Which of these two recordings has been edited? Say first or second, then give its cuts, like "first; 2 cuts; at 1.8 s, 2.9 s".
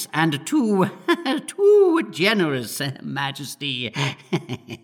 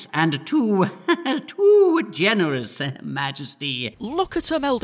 second; 1 cut; at 3.9 s